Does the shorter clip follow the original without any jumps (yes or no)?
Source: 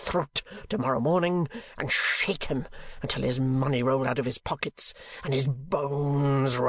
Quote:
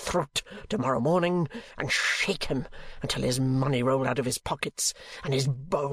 yes